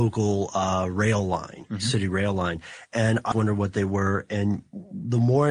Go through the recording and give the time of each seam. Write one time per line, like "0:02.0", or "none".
0:03.3